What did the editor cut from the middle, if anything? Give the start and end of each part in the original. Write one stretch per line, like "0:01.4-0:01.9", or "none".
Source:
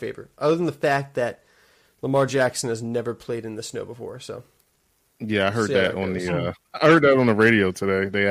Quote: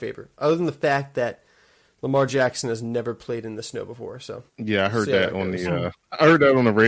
0:04.5-0:05.1